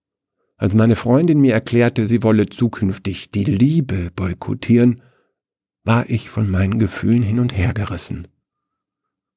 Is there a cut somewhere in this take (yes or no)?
no